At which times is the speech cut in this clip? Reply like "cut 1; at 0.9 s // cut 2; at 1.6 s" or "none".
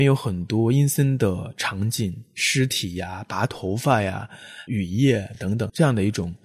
none